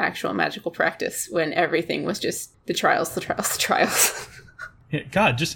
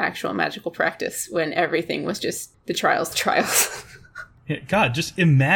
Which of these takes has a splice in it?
second; 1 cut; at 3.1 s

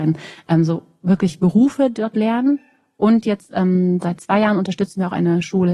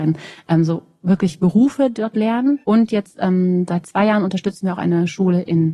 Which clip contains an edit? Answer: second; 1 cut; at 2.6 s

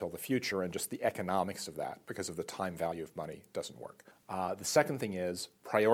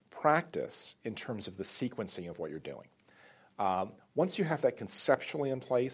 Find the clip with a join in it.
first; 1 cut; at 4.1 s

